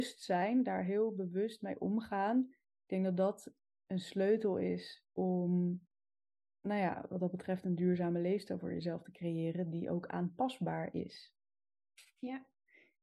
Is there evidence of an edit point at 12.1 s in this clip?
no; 0 cuts

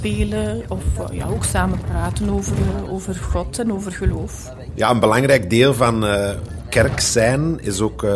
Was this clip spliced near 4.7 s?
no; 0 cuts

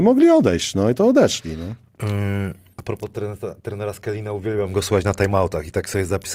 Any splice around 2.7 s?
yes; 1 cut; at 2.7 s

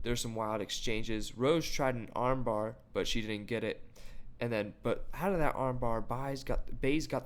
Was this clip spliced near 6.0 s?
no; 0 cuts

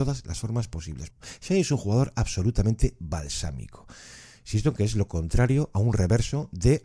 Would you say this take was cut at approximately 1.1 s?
yes; 1 cut; at 1.1 s

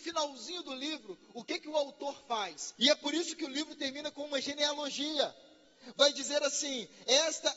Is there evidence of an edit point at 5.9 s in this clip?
no; 1 cut; at 2.8 s

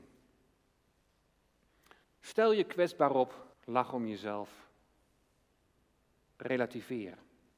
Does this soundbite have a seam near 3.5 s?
yes; 2 cuts; at 2.0 s, 3.5 s

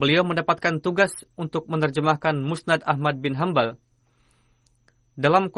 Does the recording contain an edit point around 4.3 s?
no; 0 cuts

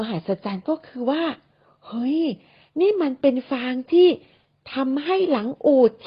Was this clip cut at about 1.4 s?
no; 0 cuts

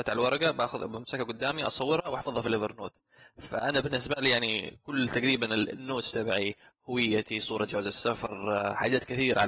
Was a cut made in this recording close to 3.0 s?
no; 0 cuts

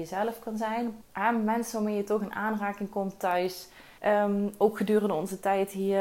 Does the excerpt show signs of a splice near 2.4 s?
no; 2 cuts; at 1.0 s, 4.0 s

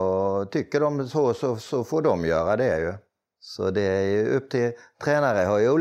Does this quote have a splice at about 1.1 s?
yes; 1 cut; at 1.1 s

